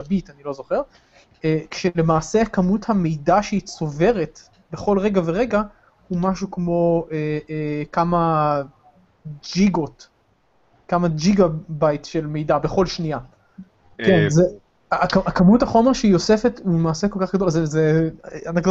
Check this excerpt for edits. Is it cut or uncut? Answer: cut